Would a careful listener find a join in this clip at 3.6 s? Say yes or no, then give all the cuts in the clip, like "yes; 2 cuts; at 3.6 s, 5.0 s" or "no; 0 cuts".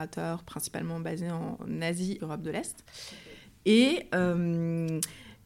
no; 1 cut; at 2.2 s